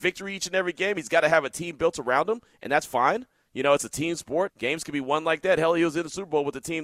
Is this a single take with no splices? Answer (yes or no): no